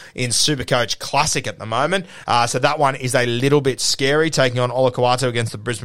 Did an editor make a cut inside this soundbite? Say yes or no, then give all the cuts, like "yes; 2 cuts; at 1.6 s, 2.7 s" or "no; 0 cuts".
no; 0 cuts